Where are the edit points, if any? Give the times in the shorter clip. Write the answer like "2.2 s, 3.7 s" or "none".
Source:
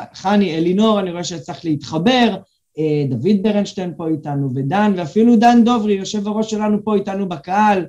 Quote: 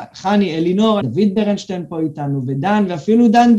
1.0 s